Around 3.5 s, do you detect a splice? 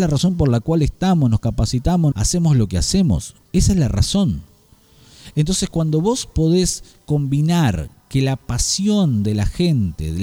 no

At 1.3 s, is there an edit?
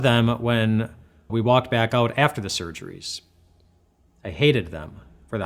yes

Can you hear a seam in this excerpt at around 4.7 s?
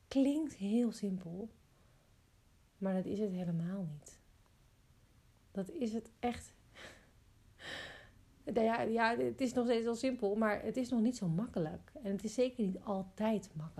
no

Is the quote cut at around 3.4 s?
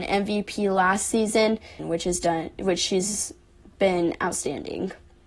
no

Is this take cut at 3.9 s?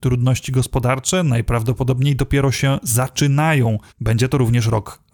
yes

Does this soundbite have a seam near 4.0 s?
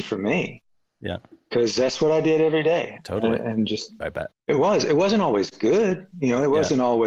yes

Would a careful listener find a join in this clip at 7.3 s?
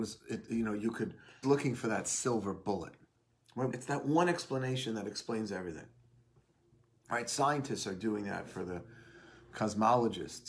no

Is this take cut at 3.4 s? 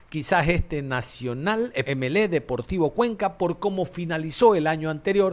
no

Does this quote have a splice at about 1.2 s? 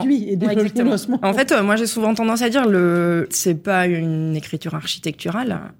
no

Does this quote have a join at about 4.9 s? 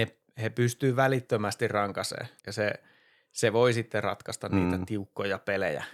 no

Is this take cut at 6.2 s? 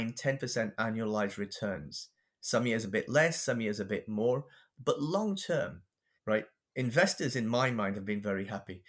yes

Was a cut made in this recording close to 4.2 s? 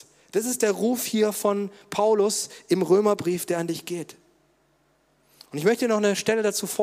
no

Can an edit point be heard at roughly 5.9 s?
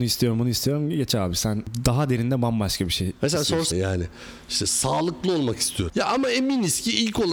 no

